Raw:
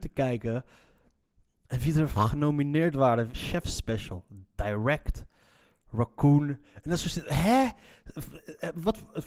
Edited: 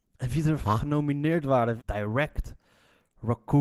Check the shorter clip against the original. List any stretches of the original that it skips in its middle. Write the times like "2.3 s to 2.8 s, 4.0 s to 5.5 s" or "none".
3.3 s to 4.5 s